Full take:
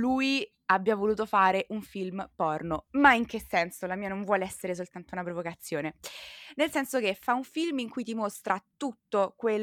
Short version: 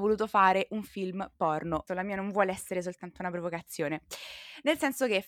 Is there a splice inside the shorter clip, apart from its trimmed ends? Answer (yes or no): yes